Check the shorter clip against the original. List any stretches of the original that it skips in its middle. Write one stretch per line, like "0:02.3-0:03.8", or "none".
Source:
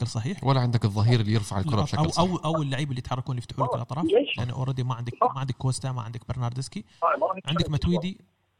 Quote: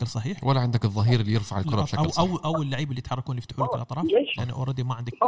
none